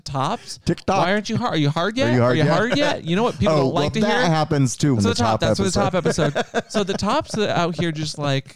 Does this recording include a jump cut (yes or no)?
yes